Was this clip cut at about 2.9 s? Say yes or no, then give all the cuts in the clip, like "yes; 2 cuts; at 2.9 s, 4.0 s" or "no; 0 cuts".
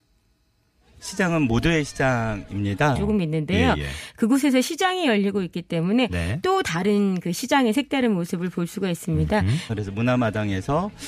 yes; 2 cuts; at 2.9 s, 9.7 s